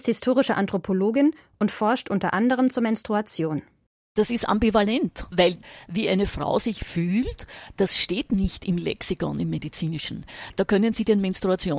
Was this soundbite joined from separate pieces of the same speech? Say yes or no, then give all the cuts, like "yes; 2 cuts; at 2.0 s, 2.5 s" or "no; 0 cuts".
no; 0 cuts